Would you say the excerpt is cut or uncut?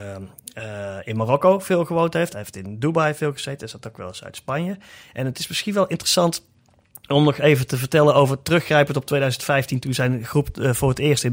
cut